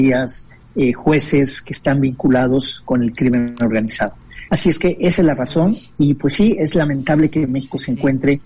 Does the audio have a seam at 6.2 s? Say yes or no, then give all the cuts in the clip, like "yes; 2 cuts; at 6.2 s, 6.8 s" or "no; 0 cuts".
no; 1 cut; at 4.5 s